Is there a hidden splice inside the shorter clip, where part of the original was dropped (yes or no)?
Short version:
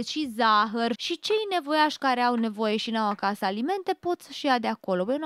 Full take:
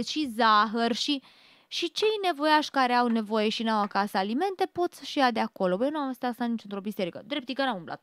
yes